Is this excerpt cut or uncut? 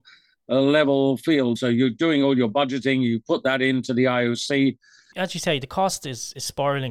cut